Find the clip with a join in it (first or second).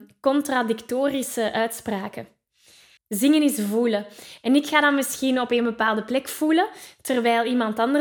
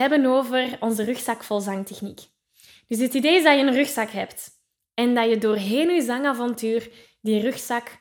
first